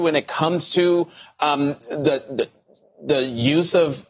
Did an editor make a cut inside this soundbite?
no; 0 cuts

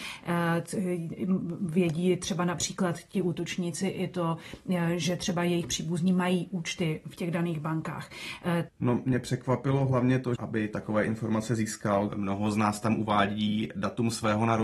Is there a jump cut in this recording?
yes; 3 cuts; at 8.7 s, 10.4 s, 12.1 s

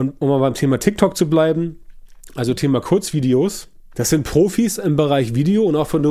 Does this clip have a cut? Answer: yes; 1 cut; at 3.9 s

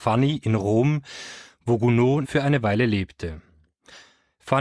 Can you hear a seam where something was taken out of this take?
yes; 1 cut; at 2.2 s

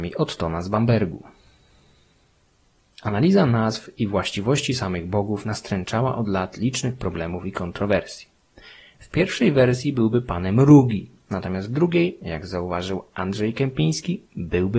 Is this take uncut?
no; 1 cut; at 9.0 s

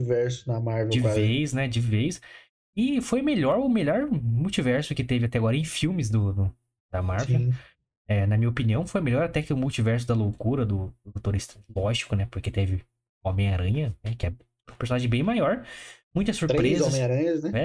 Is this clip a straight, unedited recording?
yes; 0 cuts

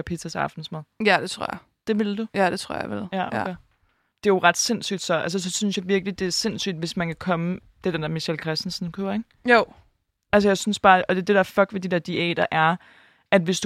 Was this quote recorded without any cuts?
yes; 0 cuts

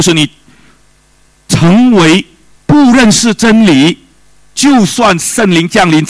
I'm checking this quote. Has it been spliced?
yes; 1 cut; at 2.6 s

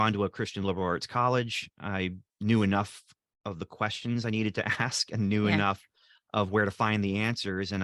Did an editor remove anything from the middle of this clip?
no; 0 cuts

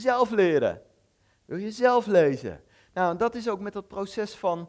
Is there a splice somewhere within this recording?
no; 0 cuts

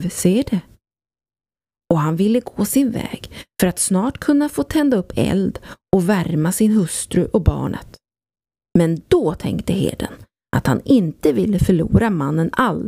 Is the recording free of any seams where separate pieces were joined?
yes; 0 cuts

